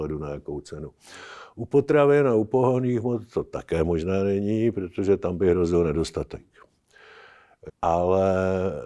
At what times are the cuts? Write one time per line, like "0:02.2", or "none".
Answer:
0:07.7